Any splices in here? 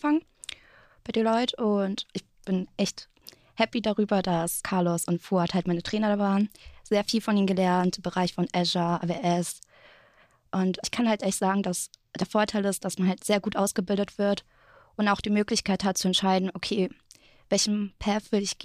no; 0 cuts

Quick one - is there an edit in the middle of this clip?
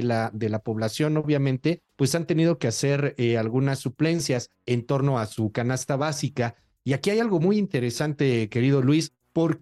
no; 0 cuts

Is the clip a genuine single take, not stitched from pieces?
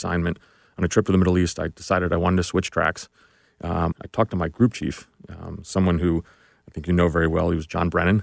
no; 1 cut; at 3.9 s

